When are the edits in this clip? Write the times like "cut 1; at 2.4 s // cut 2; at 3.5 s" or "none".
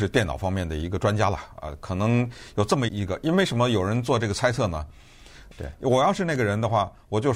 cut 1; at 2.9 s // cut 2; at 5.5 s